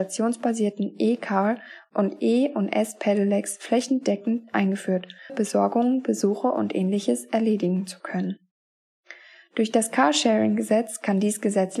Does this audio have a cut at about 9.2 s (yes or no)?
no